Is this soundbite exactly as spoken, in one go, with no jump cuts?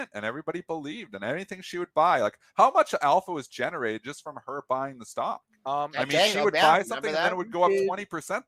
yes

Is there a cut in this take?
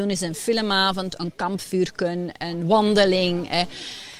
no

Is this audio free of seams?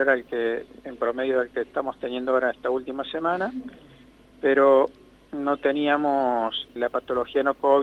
no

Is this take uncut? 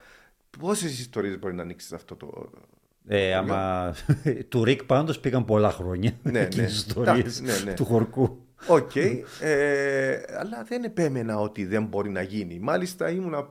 yes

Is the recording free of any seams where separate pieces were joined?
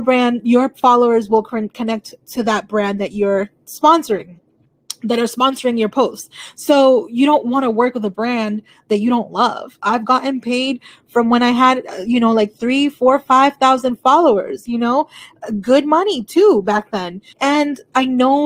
no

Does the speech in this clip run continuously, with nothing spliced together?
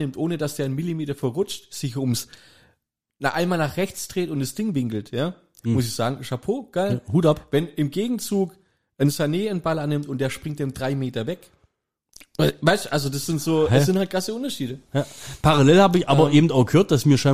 yes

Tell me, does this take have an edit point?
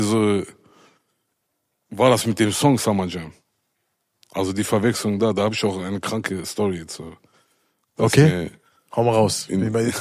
no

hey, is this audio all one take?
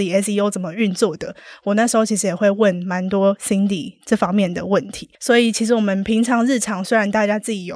no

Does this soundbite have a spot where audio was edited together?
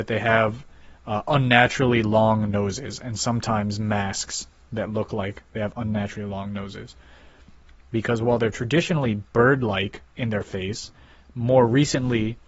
yes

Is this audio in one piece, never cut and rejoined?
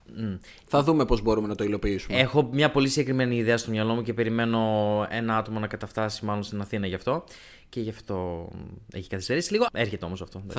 no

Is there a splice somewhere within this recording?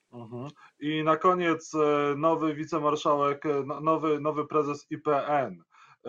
no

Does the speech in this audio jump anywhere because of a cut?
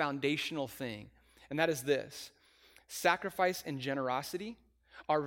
no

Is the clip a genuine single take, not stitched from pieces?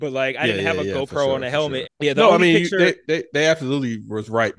no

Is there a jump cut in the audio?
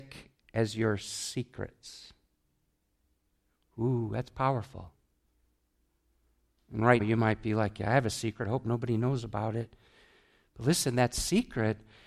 yes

